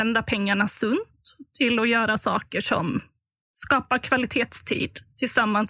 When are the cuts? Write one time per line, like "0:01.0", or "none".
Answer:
none